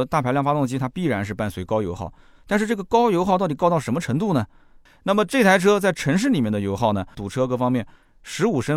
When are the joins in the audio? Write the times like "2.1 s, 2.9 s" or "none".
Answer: 4.9 s, 7.1 s